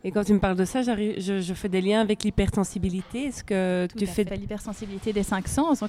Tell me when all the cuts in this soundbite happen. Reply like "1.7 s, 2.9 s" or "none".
4.3 s